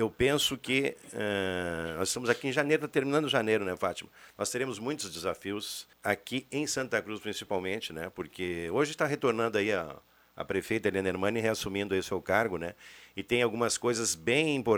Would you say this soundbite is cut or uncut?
cut